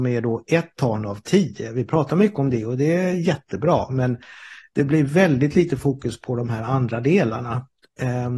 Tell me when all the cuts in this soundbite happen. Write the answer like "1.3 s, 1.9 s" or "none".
none